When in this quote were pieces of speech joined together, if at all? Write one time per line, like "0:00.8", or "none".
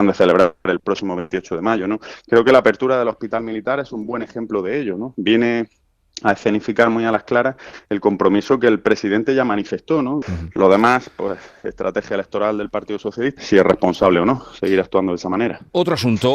0:10.2
0:13.4